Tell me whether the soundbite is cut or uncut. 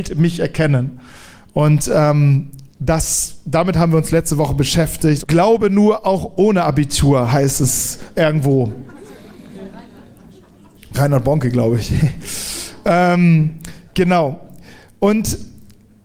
cut